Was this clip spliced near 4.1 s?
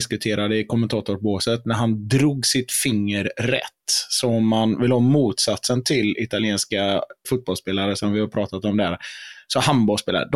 no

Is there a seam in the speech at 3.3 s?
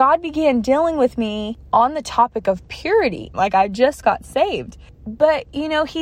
yes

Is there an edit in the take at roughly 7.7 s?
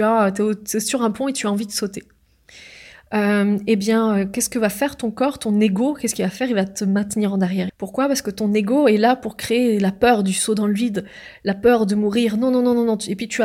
yes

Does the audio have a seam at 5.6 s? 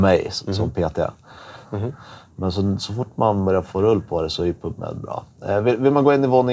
no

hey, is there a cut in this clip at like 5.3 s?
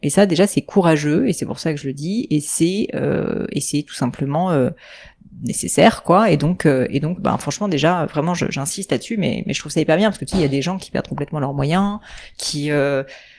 no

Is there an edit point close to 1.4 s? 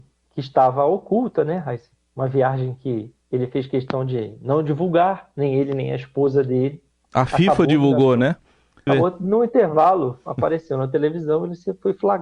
no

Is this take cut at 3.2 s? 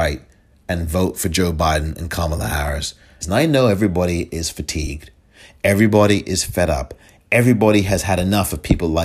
yes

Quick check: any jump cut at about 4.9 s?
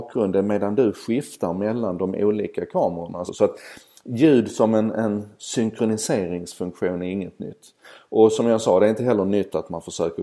no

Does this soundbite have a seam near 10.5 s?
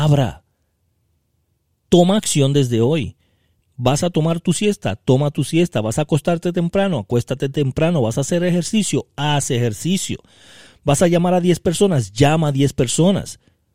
no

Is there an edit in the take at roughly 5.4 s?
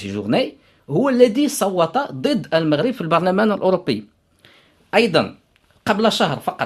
no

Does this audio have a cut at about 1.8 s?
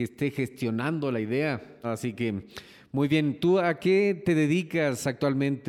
yes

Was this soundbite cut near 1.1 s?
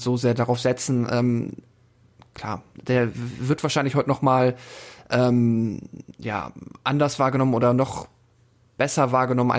no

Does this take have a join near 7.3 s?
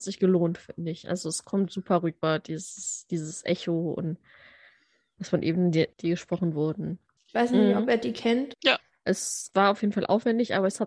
yes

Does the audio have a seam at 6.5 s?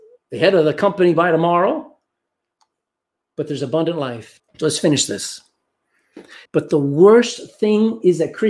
yes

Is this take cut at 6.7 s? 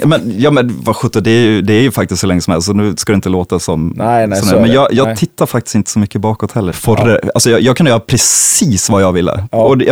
yes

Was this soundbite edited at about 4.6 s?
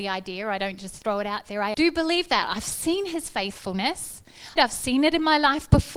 yes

